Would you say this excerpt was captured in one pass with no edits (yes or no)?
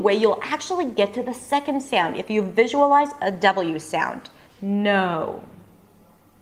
no